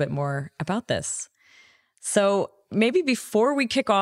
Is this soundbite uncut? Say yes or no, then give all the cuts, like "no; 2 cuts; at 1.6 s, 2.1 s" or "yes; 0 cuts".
yes; 0 cuts